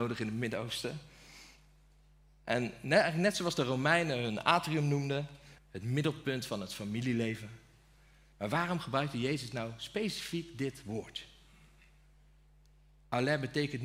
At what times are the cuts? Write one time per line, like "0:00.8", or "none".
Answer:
0:05.6